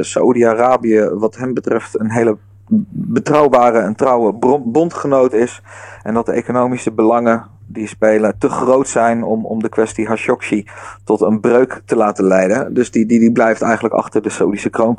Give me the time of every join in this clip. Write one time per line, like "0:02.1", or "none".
none